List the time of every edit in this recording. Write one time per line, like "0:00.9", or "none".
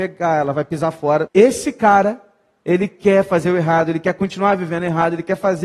0:01.3